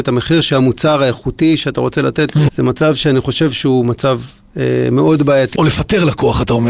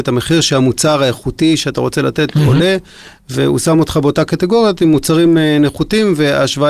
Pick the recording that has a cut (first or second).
first